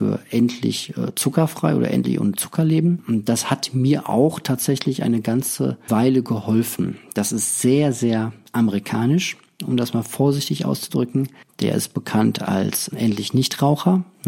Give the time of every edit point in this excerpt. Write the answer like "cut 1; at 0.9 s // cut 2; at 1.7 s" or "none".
cut 1; at 5.9 s // cut 2; at 11.5 s // cut 3; at 12.9 s